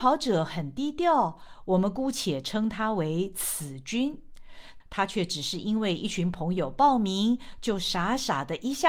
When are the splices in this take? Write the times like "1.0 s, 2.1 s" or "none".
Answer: 4.8 s

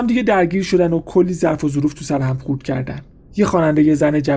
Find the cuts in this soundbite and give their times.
3.3 s

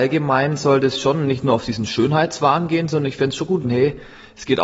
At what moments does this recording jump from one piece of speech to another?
3.6 s

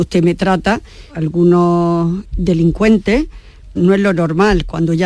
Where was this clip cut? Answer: 1.1 s, 3.8 s

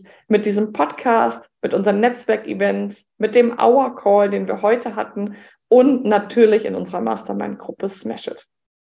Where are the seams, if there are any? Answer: none

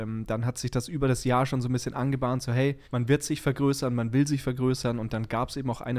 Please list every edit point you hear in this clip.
2.8 s

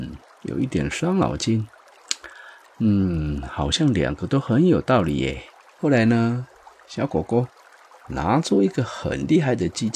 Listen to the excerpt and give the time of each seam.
5.7 s

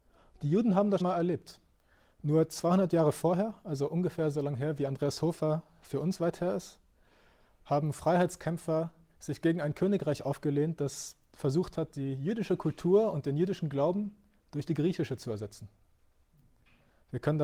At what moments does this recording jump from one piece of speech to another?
1.0 s

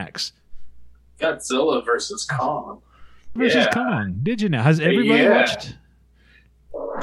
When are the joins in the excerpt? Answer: 3.4 s

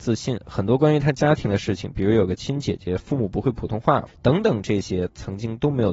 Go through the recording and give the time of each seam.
4.1 s

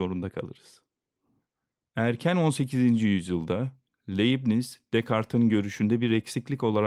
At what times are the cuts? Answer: none

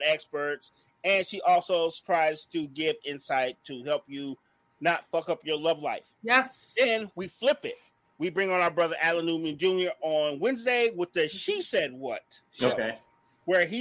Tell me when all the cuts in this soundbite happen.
none

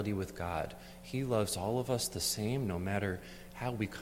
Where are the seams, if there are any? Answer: none

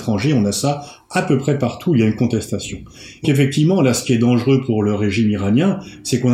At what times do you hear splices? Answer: 3.2 s

